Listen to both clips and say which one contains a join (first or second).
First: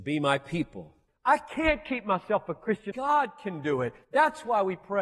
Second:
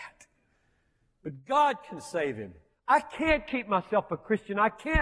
first